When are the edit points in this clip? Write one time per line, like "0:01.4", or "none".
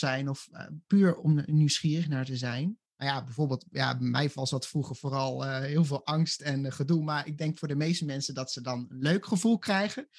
0:02.9